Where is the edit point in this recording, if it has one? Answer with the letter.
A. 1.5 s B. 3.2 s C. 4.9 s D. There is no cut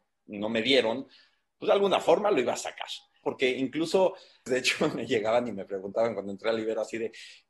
B